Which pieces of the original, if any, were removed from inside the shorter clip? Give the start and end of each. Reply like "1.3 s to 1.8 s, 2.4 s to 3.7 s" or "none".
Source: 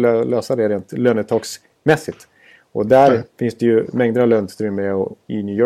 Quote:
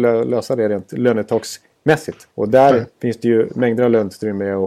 2.3 s to 2.7 s